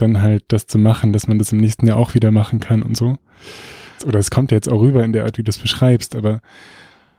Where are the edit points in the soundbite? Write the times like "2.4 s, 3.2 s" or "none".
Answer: 4.0 s